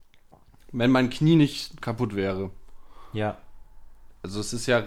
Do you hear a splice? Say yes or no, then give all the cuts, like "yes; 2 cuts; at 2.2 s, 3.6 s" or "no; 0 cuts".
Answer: no; 0 cuts